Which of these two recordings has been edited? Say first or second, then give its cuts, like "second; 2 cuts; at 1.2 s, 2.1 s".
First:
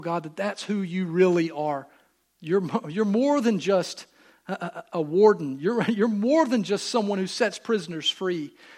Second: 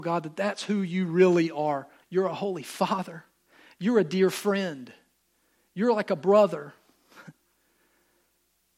second; 1 cut; at 2.0 s